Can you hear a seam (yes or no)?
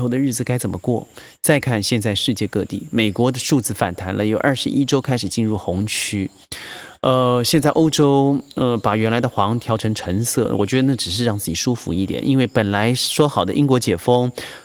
yes